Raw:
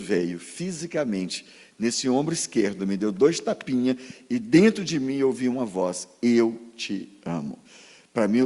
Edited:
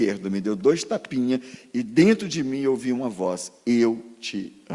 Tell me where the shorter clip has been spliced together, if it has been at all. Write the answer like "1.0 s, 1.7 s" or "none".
none